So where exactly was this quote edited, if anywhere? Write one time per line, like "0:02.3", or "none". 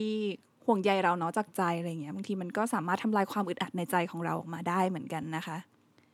none